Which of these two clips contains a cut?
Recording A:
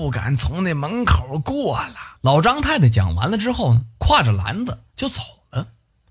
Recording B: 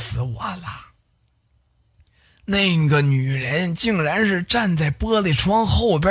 A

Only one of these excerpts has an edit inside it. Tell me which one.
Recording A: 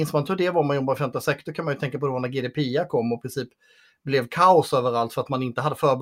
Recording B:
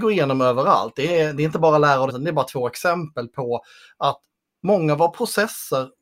B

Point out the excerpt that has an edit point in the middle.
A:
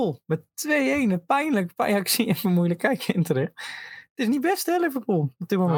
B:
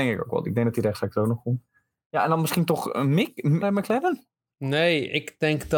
B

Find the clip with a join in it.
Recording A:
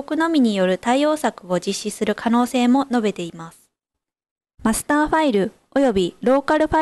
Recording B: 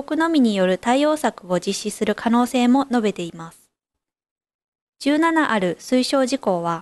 A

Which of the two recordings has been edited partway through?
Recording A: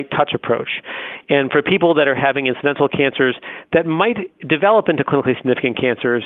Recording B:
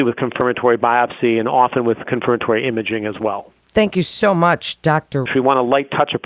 B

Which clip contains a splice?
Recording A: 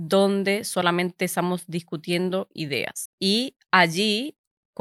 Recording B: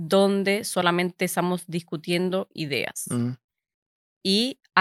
A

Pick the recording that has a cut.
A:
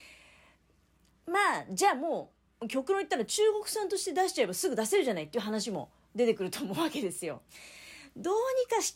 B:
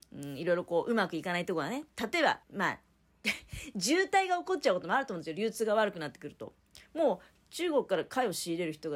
B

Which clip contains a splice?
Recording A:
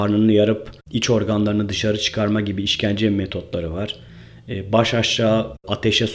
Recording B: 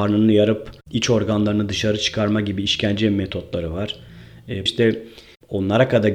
B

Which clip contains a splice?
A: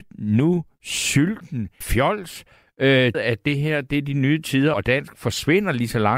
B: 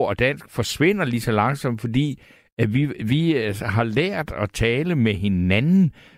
A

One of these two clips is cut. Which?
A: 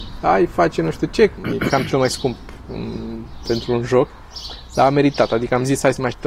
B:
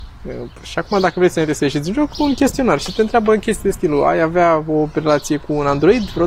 A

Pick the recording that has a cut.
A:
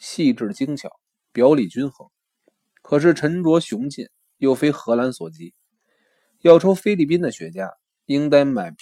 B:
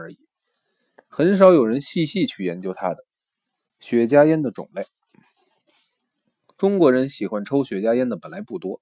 B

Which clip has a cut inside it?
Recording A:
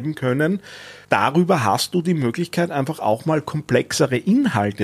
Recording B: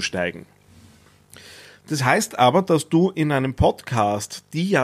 A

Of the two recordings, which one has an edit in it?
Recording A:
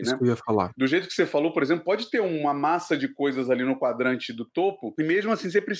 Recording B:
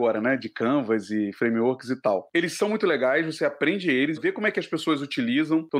B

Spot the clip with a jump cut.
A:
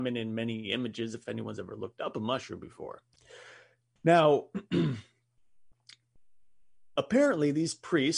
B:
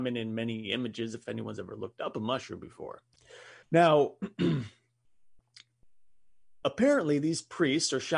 B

